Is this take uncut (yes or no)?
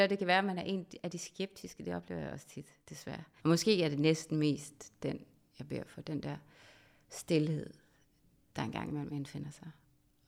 no